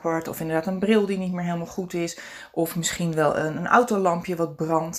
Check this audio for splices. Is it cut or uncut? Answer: uncut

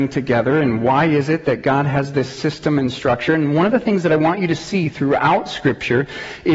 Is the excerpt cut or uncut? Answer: uncut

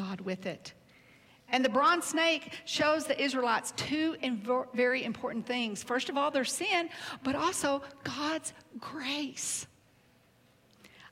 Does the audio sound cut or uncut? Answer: uncut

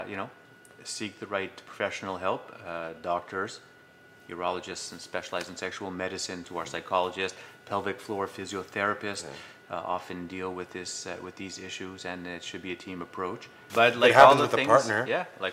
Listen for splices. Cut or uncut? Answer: cut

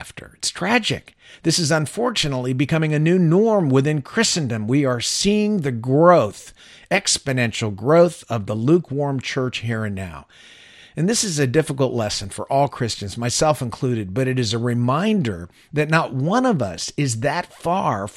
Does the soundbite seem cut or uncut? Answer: uncut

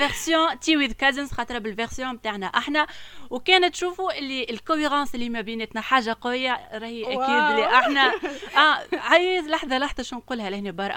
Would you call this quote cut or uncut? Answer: uncut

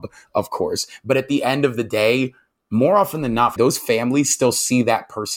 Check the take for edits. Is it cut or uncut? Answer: cut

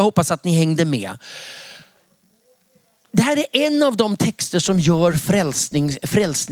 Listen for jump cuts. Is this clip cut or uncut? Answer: uncut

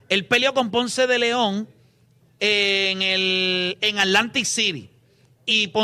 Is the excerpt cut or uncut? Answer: uncut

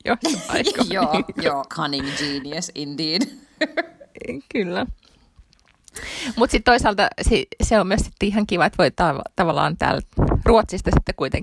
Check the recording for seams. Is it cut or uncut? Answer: cut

